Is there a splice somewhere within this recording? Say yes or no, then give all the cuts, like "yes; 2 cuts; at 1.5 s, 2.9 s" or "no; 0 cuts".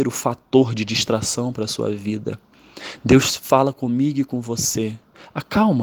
no; 0 cuts